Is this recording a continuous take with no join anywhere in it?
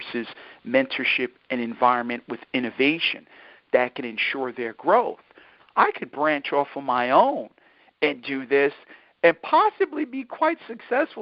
no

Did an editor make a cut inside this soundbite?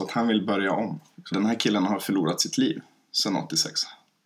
yes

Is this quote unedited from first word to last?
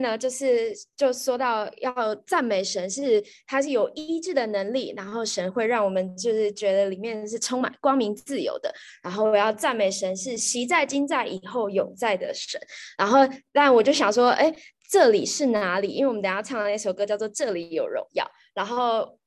yes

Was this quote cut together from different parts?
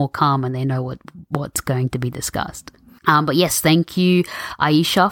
yes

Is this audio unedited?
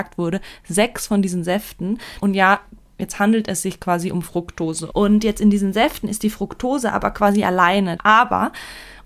no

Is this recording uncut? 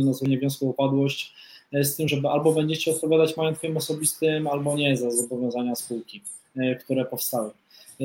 yes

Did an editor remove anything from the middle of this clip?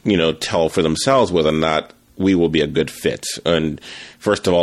no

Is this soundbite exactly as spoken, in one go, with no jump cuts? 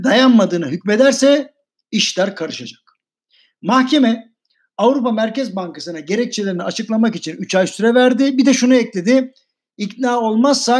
yes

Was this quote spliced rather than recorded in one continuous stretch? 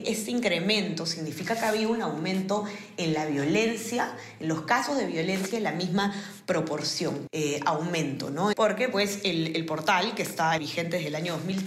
yes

